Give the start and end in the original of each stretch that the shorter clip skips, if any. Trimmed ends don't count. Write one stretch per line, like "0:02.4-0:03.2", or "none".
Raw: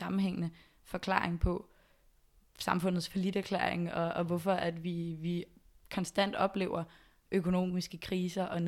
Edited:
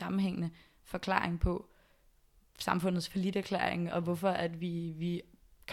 0:03.9-0:04.1